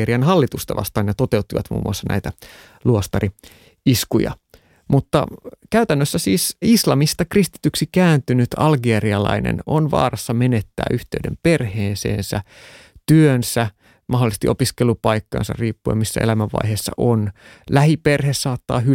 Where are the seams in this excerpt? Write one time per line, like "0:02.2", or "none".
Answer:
none